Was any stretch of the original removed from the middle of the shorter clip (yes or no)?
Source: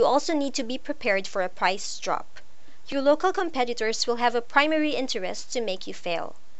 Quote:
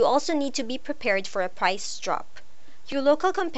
no